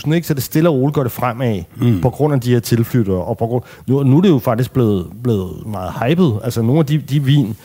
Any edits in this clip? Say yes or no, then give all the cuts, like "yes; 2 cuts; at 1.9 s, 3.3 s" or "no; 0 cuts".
no; 0 cuts